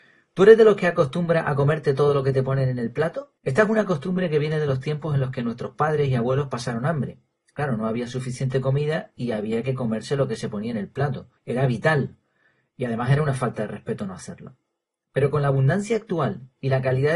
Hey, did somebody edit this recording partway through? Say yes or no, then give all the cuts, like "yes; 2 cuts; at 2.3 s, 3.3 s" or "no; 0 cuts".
yes; 2 cuts; at 3.4 s, 11.4 s